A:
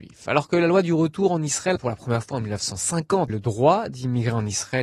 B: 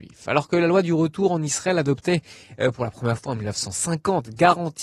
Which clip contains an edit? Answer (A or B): A